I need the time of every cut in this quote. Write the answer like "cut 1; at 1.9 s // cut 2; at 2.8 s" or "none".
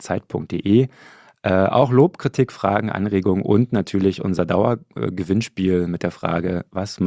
none